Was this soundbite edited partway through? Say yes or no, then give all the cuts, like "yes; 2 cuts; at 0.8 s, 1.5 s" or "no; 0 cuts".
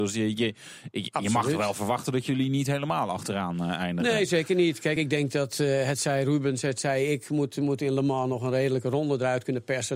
no; 0 cuts